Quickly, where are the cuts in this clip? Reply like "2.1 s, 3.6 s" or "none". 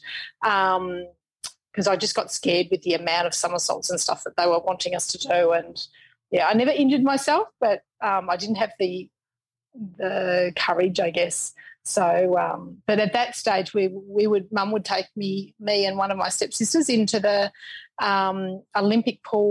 none